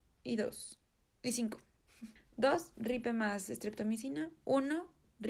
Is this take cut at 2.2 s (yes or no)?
yes